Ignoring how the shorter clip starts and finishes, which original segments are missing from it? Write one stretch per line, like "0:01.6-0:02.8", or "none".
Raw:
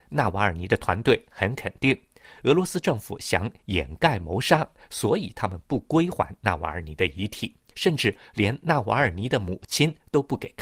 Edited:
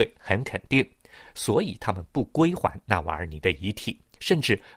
0:02.4-0:04.8